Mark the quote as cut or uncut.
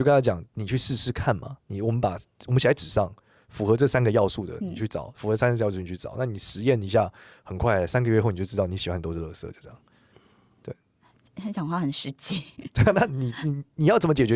uncut